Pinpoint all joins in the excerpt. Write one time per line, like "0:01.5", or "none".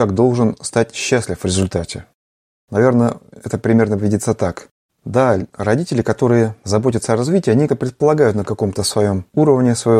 0:04.9
0:07.7